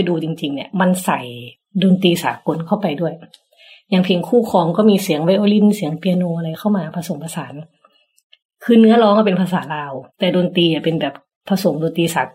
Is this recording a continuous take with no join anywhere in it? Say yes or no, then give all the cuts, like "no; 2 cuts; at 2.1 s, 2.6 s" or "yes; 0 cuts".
no; 1 cut; at 10.1 s